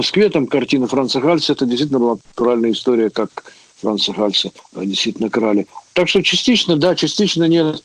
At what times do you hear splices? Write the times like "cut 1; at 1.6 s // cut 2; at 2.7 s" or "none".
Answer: none